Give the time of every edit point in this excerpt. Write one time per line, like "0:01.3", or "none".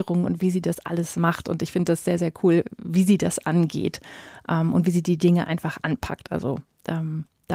none